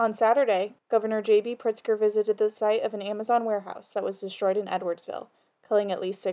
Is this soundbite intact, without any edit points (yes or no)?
yes